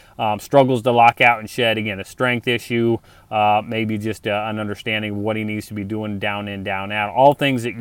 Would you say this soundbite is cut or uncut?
uncut